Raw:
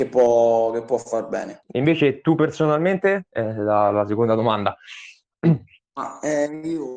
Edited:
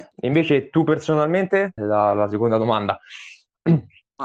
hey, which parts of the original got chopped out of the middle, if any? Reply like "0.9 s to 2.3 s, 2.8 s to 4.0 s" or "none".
3.3 s to 3.5 s